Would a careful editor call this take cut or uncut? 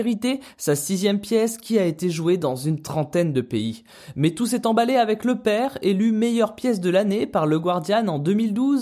uncut